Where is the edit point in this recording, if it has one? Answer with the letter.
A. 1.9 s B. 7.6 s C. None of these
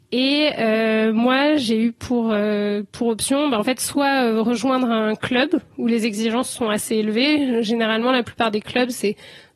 C